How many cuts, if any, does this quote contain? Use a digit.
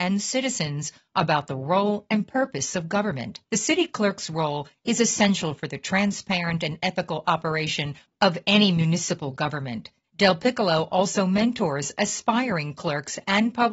2